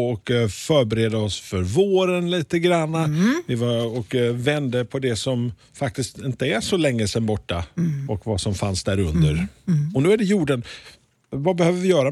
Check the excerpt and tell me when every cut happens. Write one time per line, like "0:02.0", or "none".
0:08.1